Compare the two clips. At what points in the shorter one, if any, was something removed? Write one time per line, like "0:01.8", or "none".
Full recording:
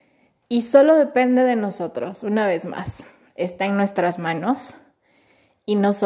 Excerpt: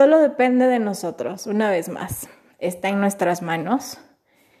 none